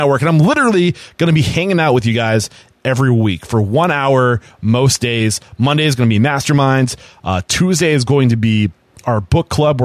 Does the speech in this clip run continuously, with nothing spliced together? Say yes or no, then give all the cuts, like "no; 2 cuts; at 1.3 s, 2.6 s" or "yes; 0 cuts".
yes; 0 cuts